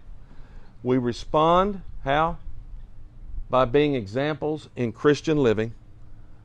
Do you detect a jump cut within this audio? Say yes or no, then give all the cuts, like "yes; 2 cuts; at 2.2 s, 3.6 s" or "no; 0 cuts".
no; 0 cuts